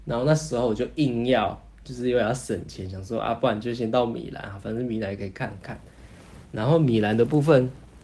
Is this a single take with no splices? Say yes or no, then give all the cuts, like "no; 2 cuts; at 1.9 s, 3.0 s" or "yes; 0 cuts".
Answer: yes; 0 cuts